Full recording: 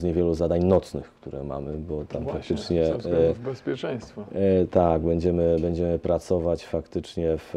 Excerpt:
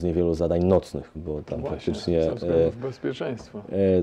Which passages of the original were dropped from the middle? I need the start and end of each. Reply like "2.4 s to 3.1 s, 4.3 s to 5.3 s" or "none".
1.1 s to 1.8 s

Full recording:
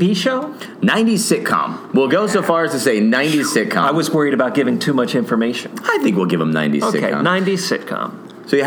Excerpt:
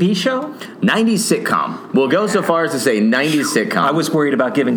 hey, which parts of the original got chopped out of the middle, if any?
none

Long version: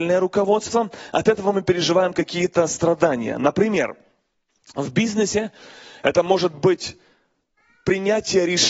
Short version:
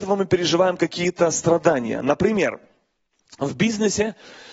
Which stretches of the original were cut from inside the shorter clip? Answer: none

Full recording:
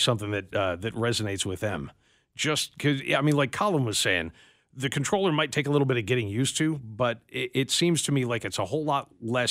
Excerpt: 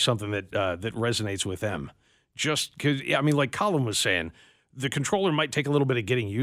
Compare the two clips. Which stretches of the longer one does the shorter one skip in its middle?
none

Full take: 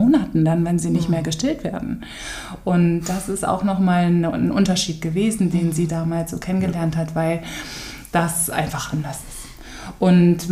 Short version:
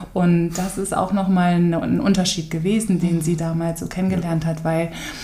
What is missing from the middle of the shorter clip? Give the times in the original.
none

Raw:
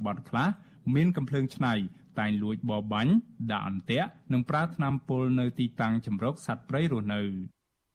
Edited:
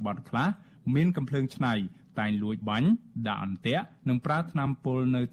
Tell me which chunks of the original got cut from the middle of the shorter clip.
2.6 s to 2.9 s

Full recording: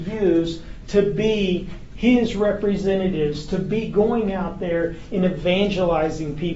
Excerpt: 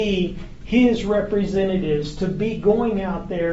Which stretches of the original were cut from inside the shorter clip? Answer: none

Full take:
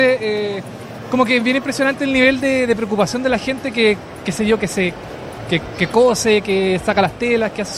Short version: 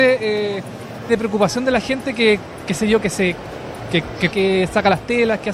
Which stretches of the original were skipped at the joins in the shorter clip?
1.1 s to 2.7 s, 5.9 s to 6.4 s

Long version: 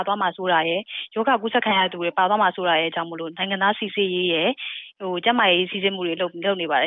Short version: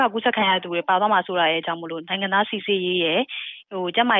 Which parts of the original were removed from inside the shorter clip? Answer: none

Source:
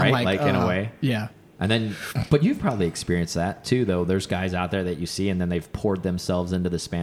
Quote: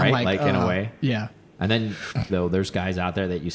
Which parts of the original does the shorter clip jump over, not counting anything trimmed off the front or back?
2.3 s to 3.9 s

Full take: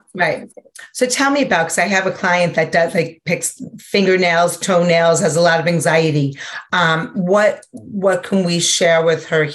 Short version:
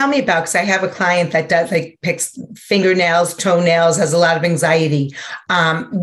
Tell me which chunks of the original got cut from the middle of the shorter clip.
none

